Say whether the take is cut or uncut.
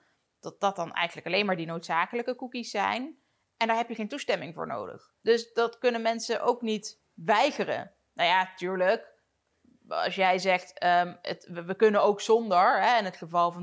uncut